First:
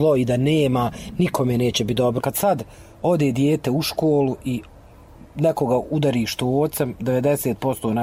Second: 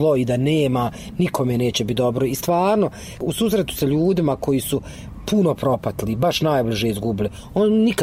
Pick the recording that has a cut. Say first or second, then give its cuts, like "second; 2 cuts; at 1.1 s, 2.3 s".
first; 1 cut; at 2.2 s